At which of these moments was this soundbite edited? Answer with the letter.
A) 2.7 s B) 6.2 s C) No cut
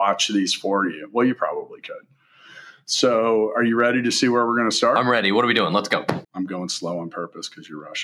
B